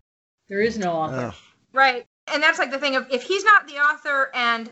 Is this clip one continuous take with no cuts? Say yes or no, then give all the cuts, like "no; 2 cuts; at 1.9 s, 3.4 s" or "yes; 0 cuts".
yes; 0 cuts